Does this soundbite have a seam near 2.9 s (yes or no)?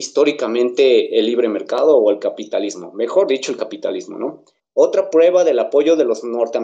no